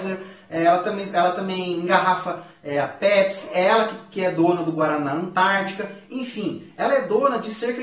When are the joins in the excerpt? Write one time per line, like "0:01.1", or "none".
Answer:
none